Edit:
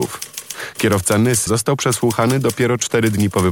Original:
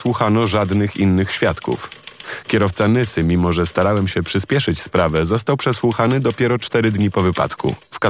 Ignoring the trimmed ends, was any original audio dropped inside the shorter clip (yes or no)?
yes